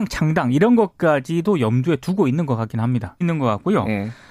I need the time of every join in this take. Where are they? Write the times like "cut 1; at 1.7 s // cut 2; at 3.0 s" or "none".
cut 1; at 3.2 s